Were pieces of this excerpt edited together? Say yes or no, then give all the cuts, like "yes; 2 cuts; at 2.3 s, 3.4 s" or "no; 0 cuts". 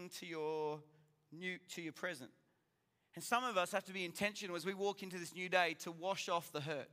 no; 0 cuts